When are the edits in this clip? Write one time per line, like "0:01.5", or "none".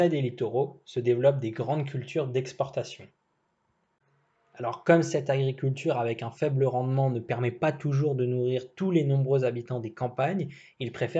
none